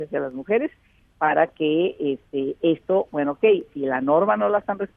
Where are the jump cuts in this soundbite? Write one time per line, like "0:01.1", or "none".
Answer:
none